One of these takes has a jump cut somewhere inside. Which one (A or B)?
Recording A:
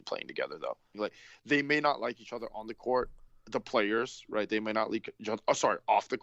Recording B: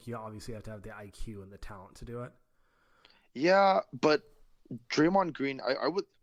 A